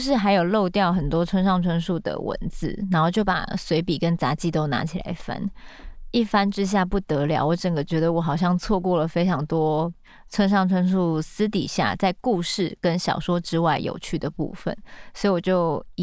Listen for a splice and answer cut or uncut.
uncut